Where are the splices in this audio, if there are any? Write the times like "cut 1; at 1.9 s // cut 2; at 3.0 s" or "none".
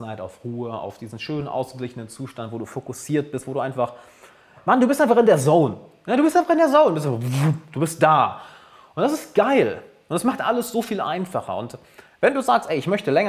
none

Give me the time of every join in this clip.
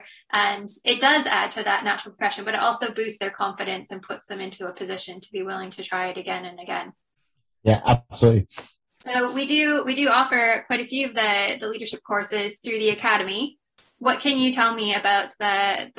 none

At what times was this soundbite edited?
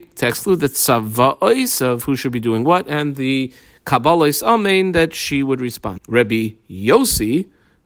cut 1; at 6.0 s

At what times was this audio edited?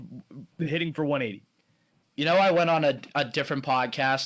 none

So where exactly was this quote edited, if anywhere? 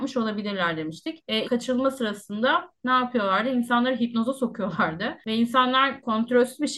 cut 1; at 1.4 s

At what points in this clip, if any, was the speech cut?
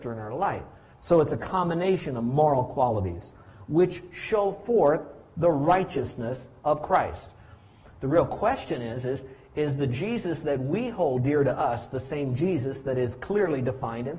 cut 1; at 0.9 s // cut 2; at 7.9 s

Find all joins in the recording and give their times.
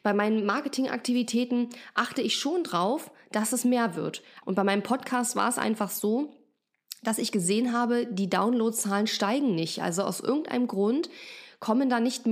cut 1; at 4.4 s

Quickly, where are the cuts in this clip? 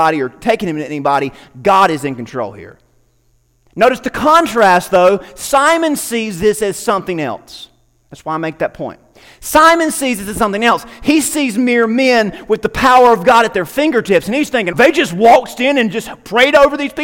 cut 1; at 14.7 s

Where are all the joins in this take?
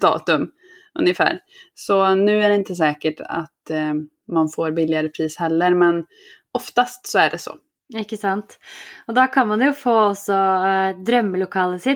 none

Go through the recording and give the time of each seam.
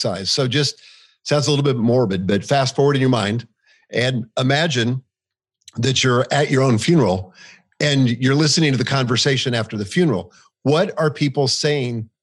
none

